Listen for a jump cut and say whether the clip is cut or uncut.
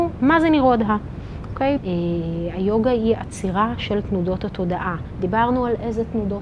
cut